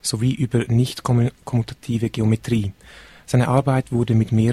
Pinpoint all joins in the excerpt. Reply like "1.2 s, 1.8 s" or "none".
none